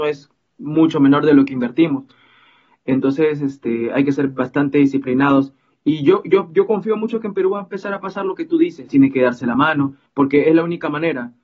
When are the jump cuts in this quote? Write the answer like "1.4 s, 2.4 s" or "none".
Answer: 8.9 s, 10.1 s